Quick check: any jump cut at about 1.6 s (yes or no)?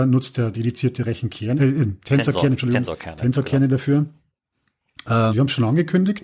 yes